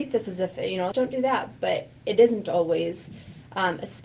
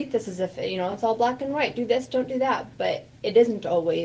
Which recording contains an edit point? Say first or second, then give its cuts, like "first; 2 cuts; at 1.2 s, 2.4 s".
first; 1 cut; at 0.9 s